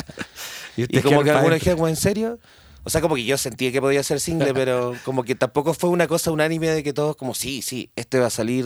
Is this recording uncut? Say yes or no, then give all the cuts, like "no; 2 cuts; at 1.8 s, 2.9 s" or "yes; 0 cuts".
yes; 0 cuts